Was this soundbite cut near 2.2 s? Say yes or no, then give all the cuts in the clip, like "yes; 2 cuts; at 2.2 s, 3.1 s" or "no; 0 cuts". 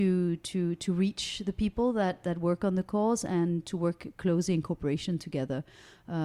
yes; 1 cut; at 2.2 s